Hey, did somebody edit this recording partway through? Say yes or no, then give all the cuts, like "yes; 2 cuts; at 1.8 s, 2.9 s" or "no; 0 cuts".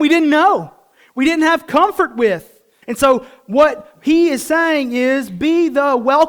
yes; 1 cut; at 2.8 s